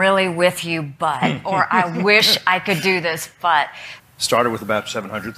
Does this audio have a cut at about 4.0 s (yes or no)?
yes